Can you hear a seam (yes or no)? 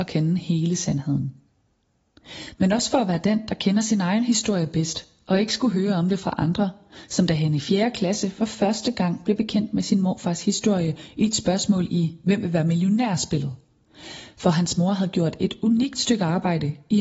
yes